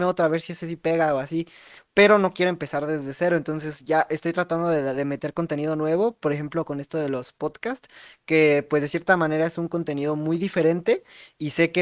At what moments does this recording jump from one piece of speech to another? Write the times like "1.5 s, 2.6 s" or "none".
1.8 s